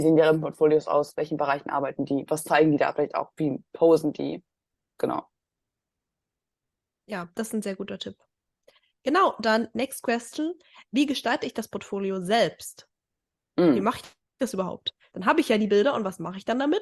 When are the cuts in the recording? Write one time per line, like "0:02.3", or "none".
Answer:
none